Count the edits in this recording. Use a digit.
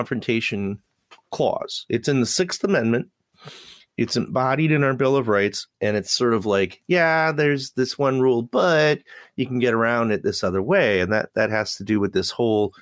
1